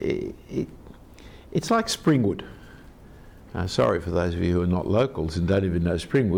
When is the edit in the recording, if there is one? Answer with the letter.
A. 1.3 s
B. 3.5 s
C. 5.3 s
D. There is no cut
D